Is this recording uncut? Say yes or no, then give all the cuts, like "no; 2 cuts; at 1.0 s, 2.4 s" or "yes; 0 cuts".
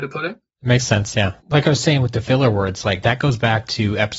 no; 2 cuts; at 1.4 s, 3.0 s